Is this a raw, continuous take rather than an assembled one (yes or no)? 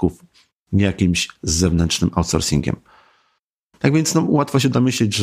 yes